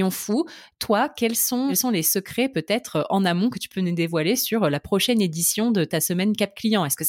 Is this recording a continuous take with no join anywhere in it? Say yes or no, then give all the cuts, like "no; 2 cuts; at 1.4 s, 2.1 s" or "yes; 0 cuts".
yes; 0 cuts